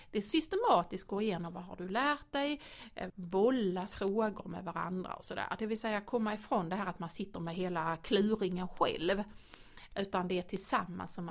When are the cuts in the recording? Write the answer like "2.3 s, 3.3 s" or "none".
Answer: 3.1 s